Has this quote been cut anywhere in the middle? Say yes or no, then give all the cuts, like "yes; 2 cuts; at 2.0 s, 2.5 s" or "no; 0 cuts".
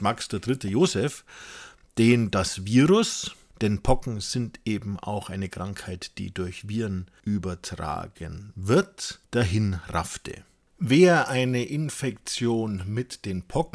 no; 0 cuts